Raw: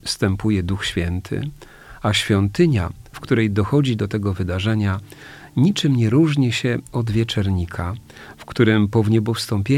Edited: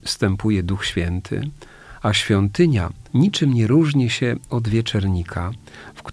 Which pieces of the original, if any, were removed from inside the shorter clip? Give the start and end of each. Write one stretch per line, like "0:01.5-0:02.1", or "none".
0:03.1-0:05.5